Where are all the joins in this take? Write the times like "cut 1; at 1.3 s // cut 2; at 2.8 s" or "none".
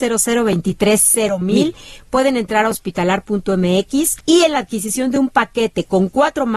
cut 1; at 4.2 s

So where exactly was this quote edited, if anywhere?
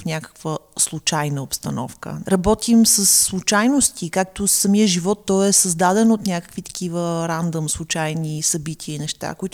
cut 1; at 2.2 s

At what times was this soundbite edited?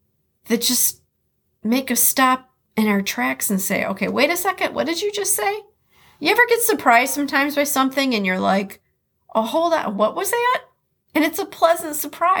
none

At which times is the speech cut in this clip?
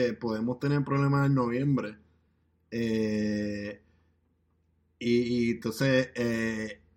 none

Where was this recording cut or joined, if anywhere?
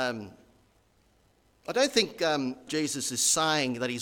cut 1; at 2.7 s

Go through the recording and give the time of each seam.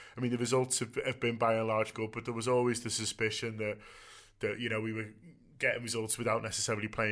cut 1; at 1.9 s

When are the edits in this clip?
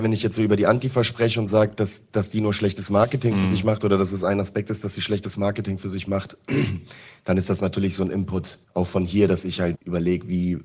cut 1; at 8.6 s // cut 2; at 9.7 s

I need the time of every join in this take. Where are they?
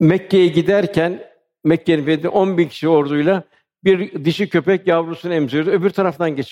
none

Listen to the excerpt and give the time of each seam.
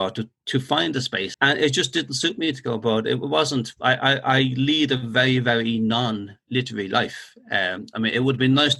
cut 1; at 1.3 s

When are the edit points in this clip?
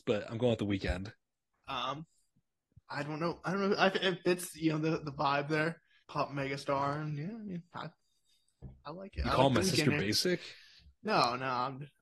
cut 1; at 1.6 s

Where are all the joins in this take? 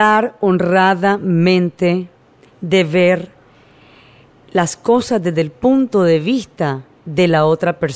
none

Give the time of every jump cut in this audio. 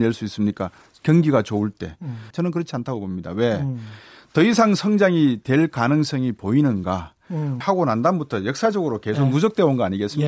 cut 1; at 2.3 s // cut 2; at 7.6 s

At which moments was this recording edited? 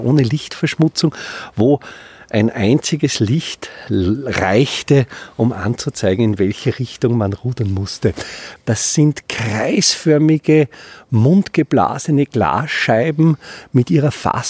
cut 1; at 8.6 s

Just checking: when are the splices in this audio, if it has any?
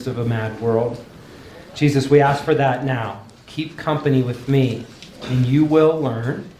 cut 1; at 3.4 s

